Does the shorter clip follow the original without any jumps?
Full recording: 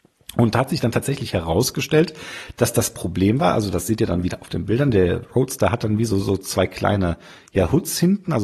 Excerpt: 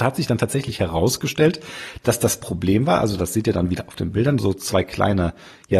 no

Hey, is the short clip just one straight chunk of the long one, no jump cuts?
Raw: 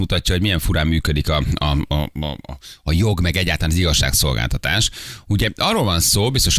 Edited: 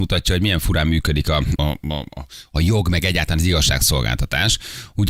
no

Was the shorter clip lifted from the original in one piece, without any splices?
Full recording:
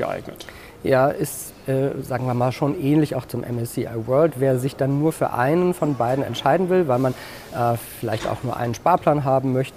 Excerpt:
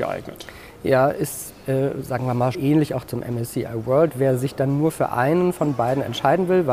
no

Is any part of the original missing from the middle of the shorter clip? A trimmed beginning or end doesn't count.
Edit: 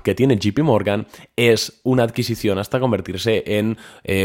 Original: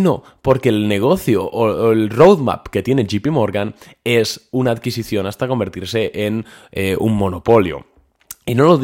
no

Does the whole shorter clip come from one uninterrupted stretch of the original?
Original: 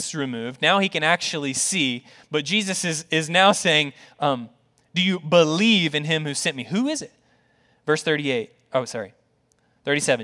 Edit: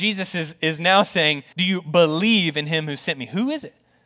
no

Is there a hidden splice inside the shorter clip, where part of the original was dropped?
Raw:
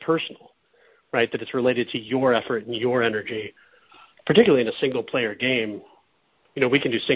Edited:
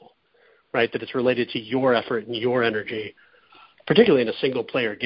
no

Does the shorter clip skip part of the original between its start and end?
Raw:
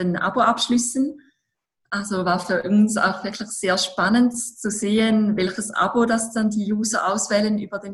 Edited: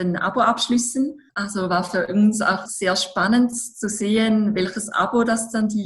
yes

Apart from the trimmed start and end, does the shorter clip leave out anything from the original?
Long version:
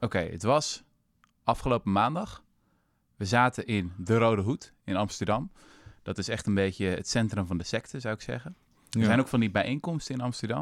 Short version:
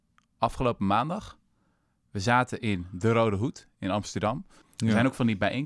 yes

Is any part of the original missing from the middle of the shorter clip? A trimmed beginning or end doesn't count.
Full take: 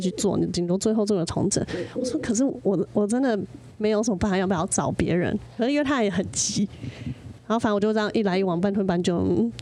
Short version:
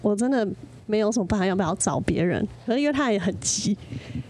no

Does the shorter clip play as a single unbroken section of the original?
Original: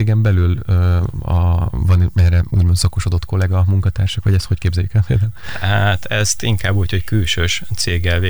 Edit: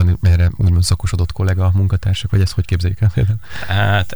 yes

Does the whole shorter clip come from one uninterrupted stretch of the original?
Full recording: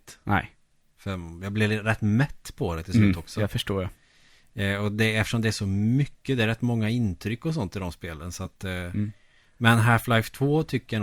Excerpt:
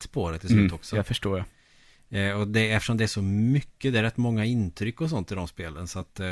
yes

